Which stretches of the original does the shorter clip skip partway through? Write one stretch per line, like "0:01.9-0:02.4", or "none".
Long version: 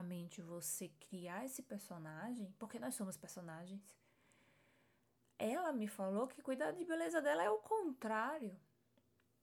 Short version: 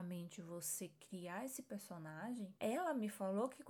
0:02.6-0:05.3